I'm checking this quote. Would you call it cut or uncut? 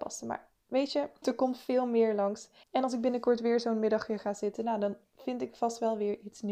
cut